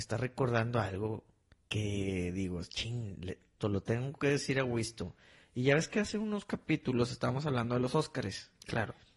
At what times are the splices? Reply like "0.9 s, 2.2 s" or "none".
3.6 s